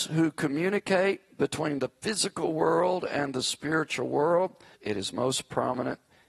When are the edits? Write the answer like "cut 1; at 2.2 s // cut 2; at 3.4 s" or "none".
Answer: cut 1; at 4.7 s